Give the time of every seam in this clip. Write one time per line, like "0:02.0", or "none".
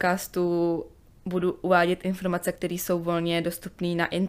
none